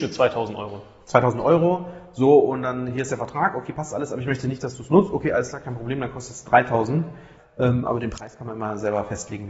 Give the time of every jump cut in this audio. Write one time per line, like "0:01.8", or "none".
0:07.4